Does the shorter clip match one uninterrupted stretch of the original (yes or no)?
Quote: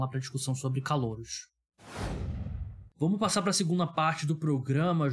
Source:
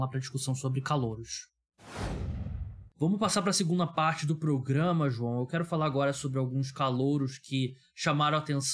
yes